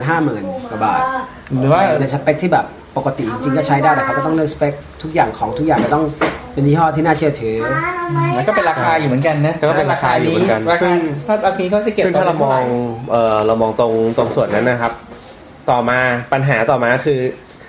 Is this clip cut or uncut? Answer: uncut